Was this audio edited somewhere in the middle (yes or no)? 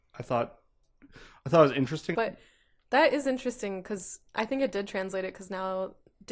yes